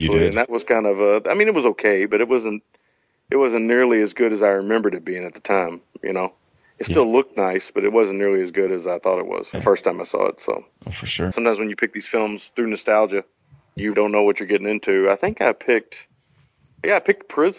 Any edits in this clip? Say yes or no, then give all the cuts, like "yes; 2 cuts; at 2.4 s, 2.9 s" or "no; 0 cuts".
yes; 3 cuts; at 9.5 s, 11.3 s, 13.9 s